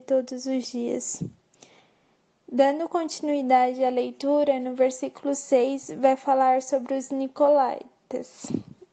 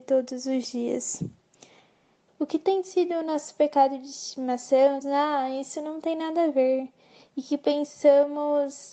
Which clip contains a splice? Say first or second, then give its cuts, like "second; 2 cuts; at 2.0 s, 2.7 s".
second; 2 cuts; at 2.3 s, 5.0 s